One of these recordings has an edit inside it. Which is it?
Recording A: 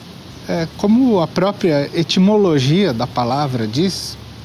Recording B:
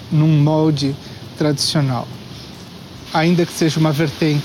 B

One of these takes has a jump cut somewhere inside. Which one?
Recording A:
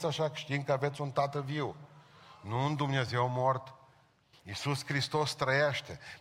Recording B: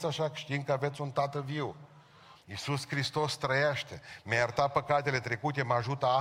B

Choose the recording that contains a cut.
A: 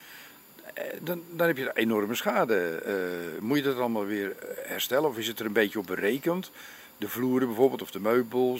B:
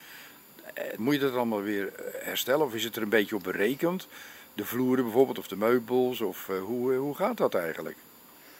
B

